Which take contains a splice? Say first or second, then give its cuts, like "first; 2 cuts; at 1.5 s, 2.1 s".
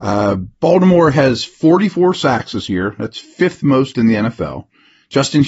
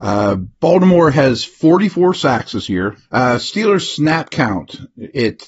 second; 1 cut; at 3.0 s